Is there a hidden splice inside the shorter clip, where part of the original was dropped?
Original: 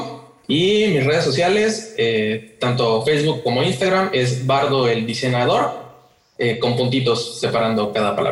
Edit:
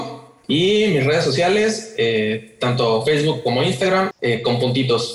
yes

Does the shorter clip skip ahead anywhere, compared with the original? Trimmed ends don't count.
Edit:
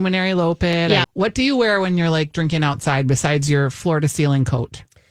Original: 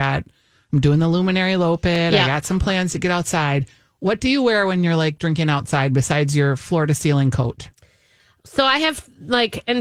yes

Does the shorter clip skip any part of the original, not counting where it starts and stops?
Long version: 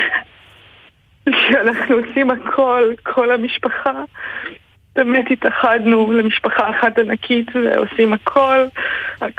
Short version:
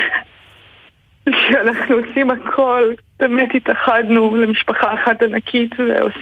yes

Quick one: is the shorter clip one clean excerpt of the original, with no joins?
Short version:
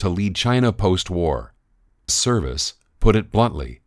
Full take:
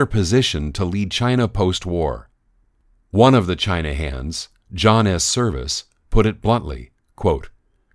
no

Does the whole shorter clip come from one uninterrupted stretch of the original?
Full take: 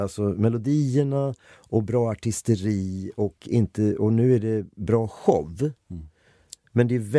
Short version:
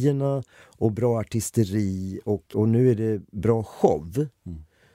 no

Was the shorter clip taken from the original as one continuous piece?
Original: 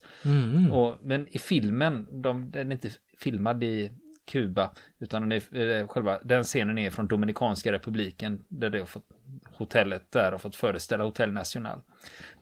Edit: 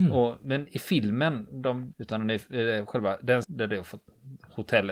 no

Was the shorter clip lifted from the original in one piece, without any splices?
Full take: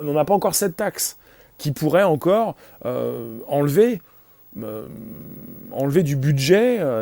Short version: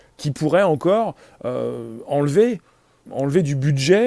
no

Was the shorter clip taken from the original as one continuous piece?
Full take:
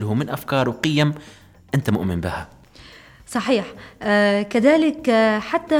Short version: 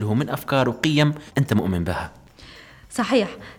no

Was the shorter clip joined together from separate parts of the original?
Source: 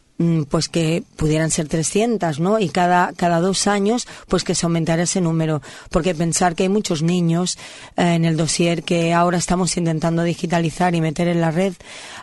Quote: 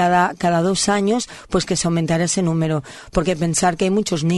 no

